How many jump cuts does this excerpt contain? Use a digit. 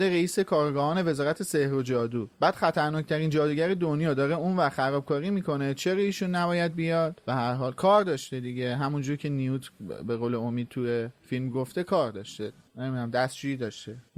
1